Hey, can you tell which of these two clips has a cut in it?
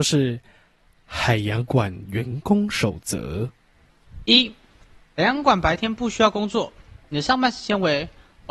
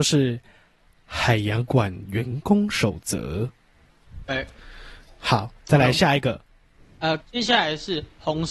second; 2 cuts; at 4.3 s, 7.2 s

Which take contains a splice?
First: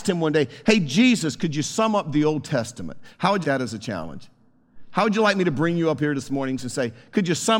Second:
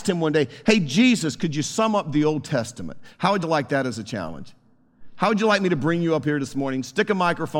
first; 2 cuts; at 3.4 s, 6.6 s

